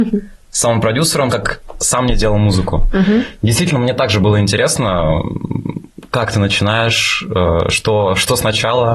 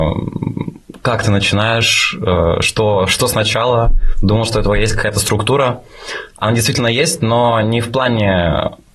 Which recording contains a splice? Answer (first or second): first